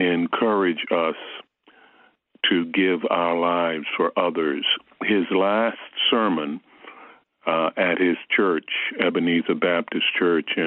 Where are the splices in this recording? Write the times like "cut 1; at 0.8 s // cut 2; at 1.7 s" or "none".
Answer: none